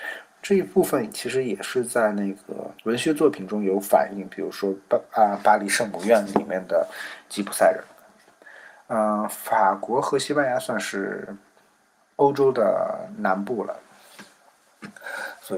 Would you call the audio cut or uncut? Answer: cut